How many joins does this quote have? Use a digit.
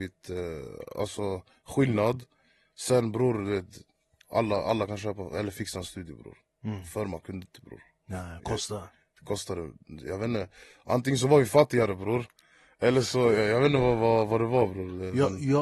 0